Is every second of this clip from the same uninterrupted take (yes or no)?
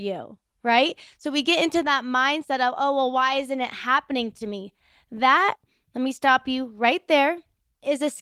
yes